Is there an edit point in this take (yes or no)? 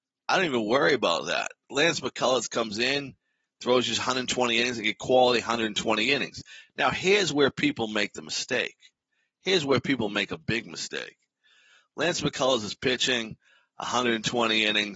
no